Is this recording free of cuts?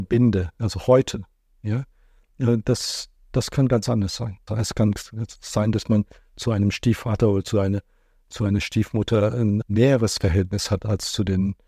no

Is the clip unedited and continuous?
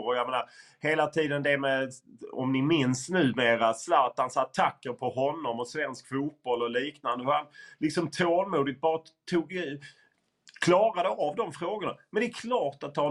yes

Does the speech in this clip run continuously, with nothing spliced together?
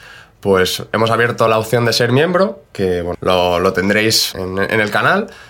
no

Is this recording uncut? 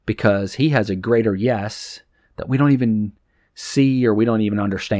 yes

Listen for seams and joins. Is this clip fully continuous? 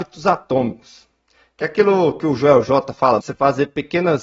no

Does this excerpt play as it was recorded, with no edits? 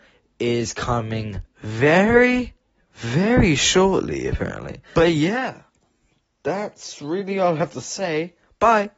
no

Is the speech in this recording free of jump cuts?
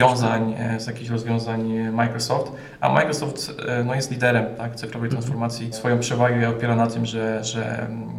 no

